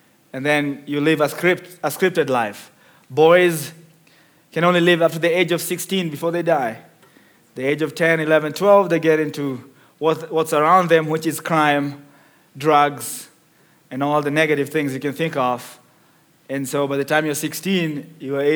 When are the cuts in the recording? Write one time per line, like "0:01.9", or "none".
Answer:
none